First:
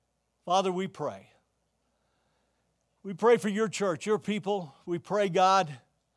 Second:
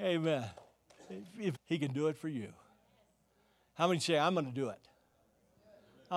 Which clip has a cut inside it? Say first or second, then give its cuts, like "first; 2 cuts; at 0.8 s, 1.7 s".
second; 1 cut; at 1.5 s